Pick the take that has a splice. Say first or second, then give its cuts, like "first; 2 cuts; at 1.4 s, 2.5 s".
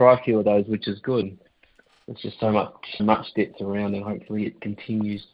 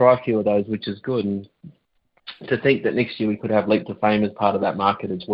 first; 2 cuts; at 1.2 s, 3.0 s